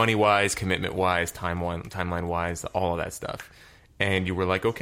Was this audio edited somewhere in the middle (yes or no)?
no